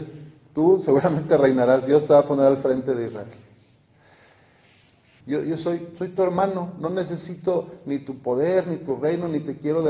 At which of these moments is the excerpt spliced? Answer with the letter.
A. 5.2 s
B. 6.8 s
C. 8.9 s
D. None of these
A